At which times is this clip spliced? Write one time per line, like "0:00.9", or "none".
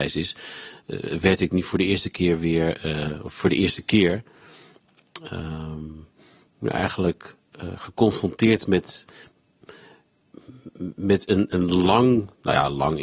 none